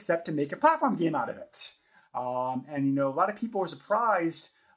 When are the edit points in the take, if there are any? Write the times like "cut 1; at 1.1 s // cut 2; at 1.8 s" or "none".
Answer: cut 1; at 2.0 s

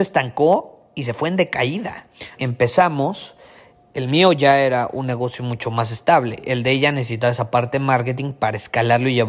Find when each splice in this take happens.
cut 1; at 2.4 s

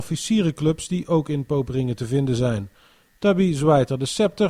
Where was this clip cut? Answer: none

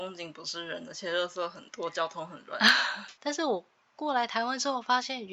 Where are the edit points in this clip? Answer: cut 1; at 3.2 s

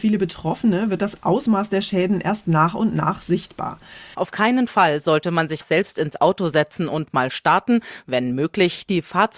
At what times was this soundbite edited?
cut 1; at 4.1 s // cut 2; at 5.6 s // cut 3; at 8.0 s

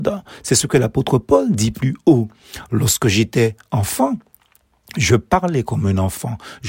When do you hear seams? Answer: none

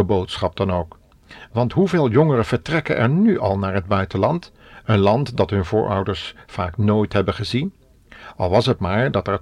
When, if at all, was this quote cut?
none

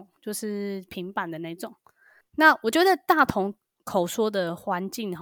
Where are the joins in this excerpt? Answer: cut 1; at 2.2 s

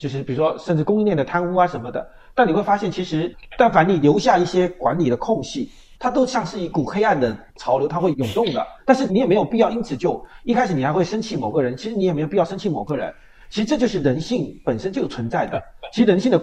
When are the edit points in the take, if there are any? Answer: none

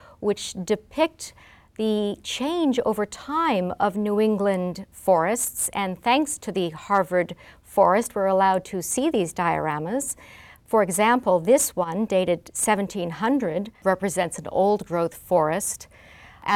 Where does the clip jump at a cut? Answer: none

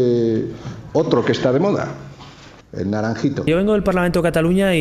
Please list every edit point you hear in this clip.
cut 1; at 2.6 s

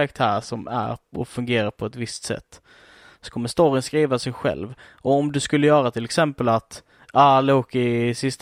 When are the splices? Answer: none

